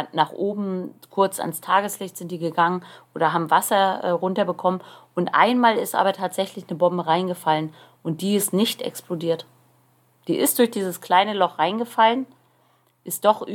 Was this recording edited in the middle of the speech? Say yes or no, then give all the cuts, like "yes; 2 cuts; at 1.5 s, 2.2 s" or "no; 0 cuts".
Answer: no; 0 cuts